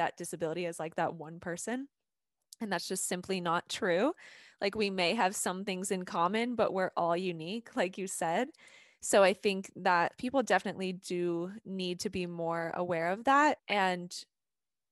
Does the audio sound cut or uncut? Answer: cut